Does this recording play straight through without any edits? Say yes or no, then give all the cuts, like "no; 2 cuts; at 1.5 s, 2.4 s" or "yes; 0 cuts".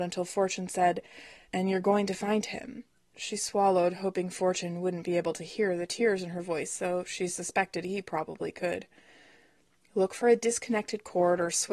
no; 2 cuts; at 1.4 s, 3.0 s